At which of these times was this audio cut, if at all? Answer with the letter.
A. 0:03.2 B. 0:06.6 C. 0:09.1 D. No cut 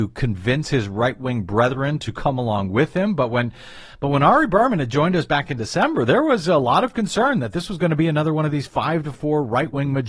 D